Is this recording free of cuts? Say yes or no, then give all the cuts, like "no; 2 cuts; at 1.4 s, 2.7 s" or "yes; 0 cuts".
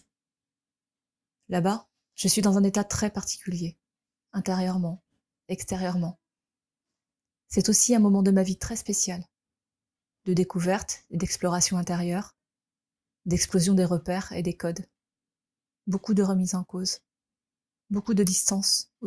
yes; 0 cuts